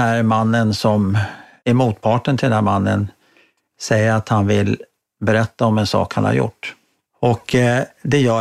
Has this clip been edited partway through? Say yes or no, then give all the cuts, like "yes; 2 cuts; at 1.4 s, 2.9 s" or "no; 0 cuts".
no; 0 cuts